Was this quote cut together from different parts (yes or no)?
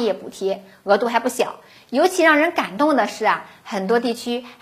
no